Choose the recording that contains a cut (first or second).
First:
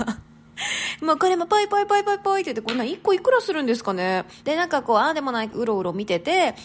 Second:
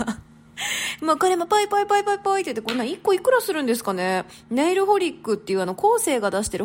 first